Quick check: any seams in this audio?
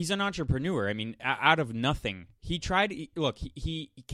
no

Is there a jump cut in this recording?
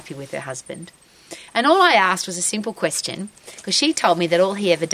no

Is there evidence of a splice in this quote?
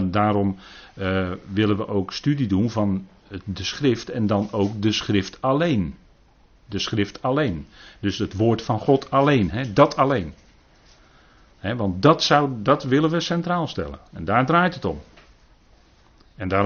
no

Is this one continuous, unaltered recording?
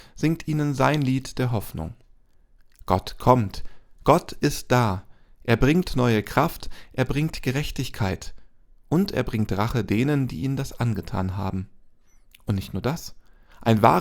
yes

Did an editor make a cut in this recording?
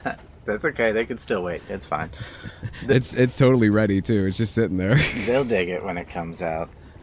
no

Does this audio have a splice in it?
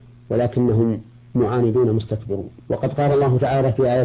yes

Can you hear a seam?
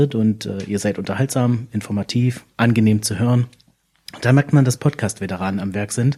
no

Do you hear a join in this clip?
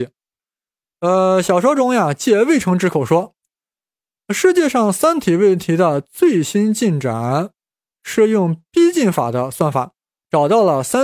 no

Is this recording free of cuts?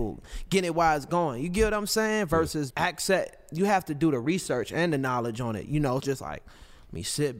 no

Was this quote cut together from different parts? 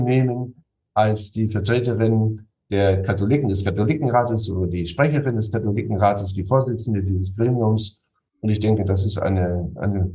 no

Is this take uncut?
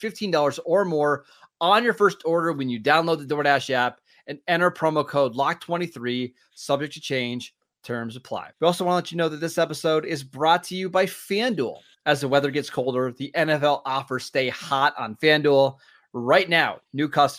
no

